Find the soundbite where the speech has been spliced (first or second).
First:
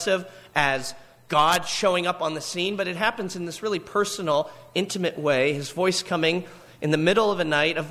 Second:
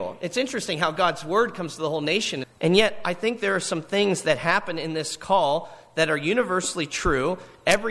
second